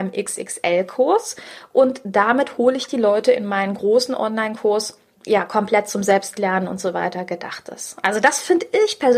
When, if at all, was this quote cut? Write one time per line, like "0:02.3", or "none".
0:05.2